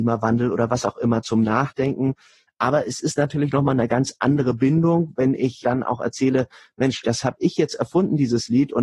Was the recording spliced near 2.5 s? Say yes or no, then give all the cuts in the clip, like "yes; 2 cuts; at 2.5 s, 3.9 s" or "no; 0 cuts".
yes; 2 cuts; at 2.5 s, 5.6 s